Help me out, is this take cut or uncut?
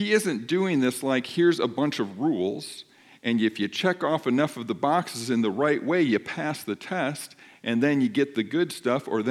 uncut